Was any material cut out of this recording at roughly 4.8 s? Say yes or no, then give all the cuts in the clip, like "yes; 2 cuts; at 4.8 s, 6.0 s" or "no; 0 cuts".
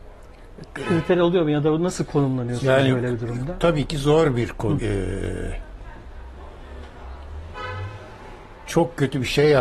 yes; 1 cut; at 4.8 s